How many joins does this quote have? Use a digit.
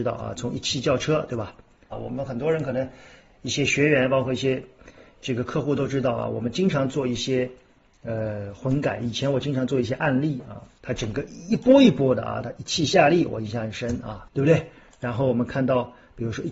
3